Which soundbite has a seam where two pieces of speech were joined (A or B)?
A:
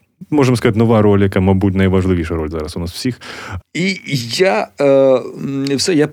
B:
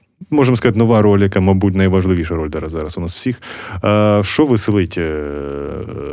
A